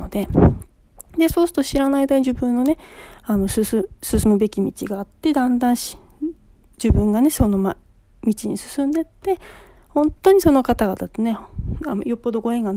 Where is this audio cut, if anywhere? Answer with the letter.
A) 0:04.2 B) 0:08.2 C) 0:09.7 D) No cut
D